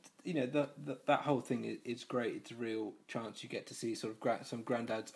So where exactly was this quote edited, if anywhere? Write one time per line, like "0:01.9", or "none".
none